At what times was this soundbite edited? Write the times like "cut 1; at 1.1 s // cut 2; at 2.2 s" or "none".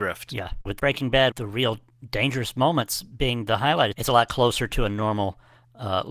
cut 1; at 1.3 s // cut 2; at 3.9 s